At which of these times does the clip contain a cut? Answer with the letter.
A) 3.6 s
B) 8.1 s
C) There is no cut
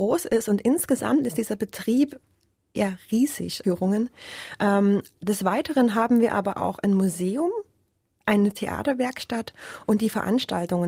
A